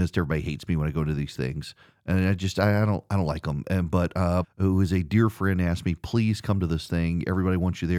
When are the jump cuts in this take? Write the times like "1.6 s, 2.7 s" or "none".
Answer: 4.4 s

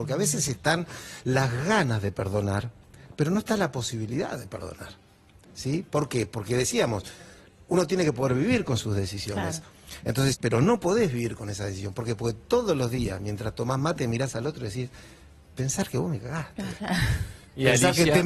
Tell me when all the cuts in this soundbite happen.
10.3 s

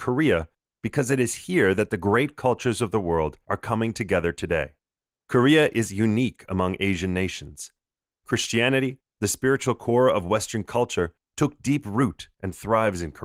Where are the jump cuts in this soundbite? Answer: 8.1 s

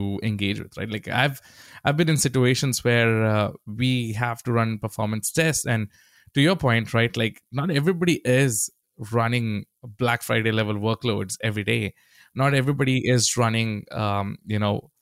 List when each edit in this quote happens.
none

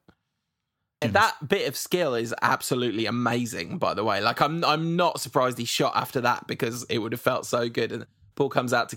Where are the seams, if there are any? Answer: 1.0 s

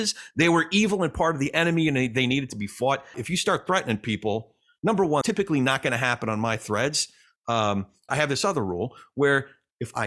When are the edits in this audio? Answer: 3.1 s, 5.2 s, 8.1 s

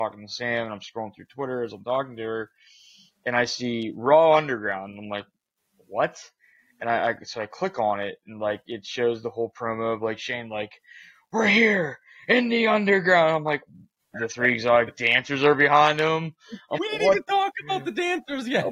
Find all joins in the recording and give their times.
14.1 s, 16.8 s

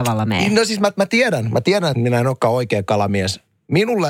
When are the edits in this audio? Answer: 1.9 s

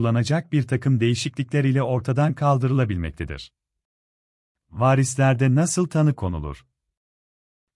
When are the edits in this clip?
none

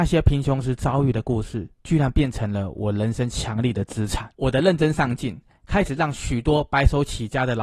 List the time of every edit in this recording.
1.8 s, 4.3 s

